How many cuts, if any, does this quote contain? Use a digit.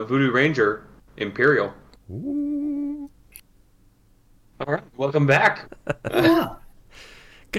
1